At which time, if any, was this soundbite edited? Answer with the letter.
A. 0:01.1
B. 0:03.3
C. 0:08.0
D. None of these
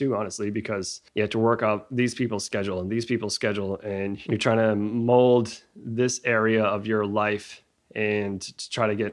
A